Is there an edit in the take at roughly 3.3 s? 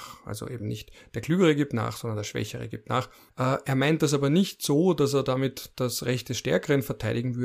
yes; 1 cut; at 3.3 s

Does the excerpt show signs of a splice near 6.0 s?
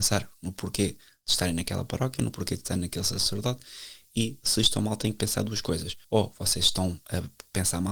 yes; 1 cut; at 6.0 s

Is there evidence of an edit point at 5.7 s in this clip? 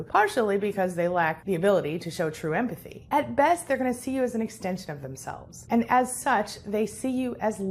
no; 1 cut; at 3.1 s

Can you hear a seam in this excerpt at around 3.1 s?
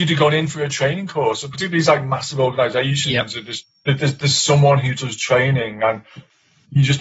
no; 0 cuts

